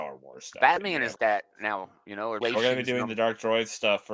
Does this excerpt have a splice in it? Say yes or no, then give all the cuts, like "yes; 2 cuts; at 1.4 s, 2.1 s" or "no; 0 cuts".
yes; 2 cuts; at 1.2 s, 2.4 s